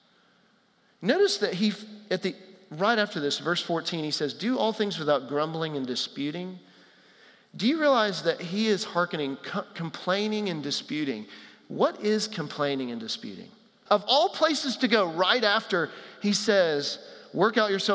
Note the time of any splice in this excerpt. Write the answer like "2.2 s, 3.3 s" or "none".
13.9 s